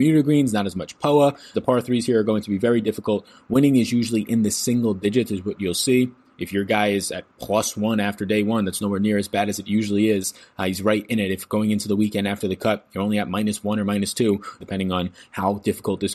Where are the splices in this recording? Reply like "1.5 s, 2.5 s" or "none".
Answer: 1.5 s, 14.6 s

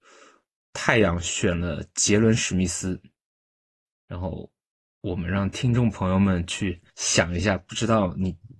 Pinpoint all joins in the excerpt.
3.9 s, 6.9 s

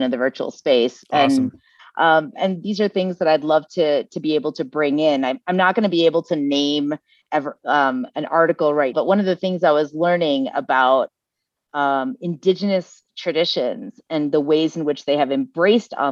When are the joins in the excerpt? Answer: 1.8 s, 8.9 s

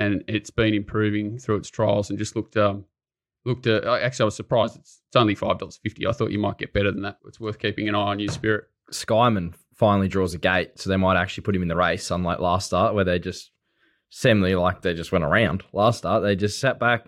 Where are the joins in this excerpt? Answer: 7.2 s

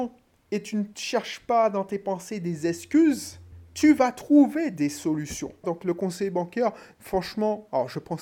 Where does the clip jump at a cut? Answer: 5.6 s

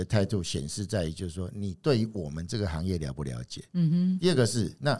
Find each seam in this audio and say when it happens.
none

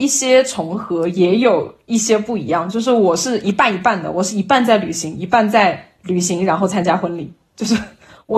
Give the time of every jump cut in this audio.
none

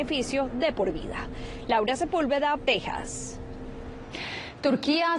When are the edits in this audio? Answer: 2.6 s

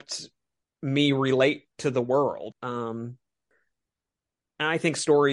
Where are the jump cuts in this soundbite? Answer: 2.5 s

